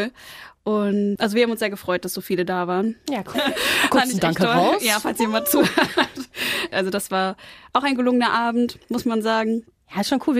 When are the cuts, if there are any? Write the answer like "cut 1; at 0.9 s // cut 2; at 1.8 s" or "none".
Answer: cut 1; at 3.3 s

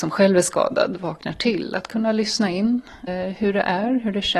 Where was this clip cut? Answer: cut 1; at 3.1 s

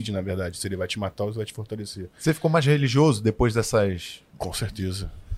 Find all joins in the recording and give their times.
cut 1; at 4.3 s

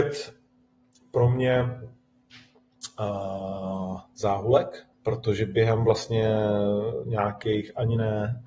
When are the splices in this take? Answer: cut 1; at 4.9 s

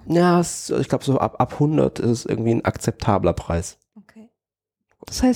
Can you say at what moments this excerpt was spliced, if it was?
none

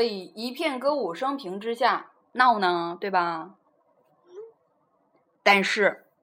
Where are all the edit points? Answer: cut 1; at 2.2 s

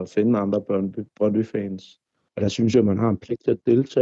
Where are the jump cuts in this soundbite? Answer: cut 1; at 2.3 s

